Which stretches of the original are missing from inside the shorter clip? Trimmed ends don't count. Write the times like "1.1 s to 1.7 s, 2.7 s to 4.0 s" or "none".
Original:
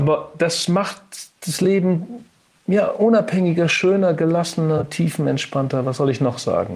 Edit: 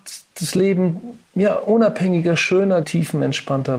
2.3 s to 2.6 s, 4.1 s to 4.9 s